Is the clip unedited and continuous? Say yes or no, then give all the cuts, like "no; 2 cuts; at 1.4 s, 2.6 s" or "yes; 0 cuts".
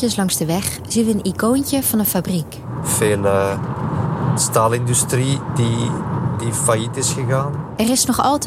yes; 0 cuts